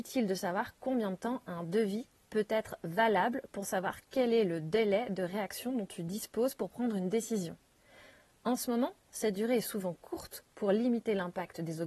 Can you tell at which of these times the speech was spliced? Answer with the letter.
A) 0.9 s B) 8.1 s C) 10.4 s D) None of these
D